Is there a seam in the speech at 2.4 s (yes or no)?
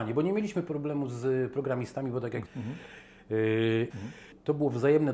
yes